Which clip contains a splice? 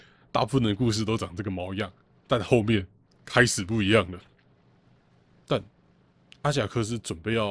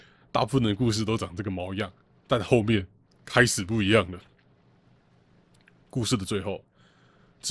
first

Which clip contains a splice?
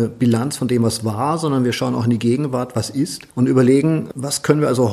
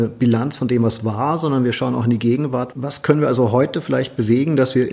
second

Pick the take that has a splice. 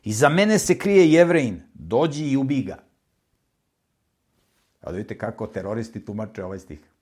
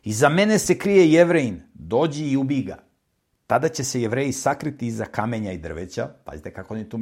second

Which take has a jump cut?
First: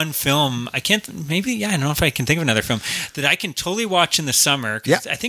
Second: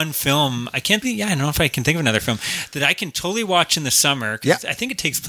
second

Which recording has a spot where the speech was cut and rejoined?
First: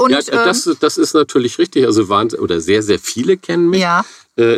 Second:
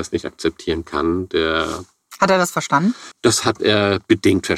second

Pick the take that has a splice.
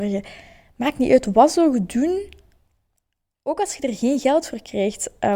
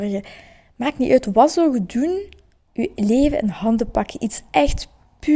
second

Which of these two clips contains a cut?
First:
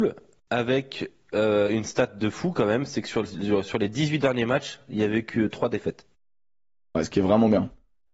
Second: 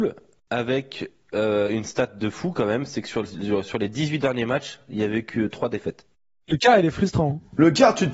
second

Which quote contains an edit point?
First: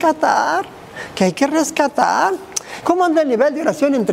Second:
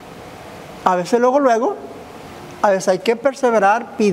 first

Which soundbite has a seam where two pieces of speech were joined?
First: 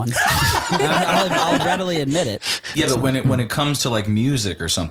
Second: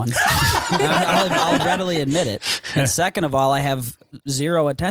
first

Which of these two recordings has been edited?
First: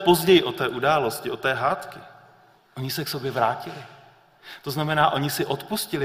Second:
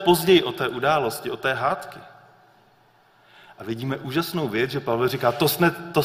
first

